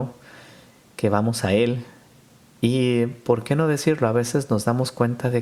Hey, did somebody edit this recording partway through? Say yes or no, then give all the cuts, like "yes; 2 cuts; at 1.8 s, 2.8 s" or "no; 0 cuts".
no; 0 cuts